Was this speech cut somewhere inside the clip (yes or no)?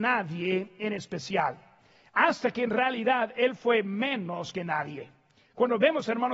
no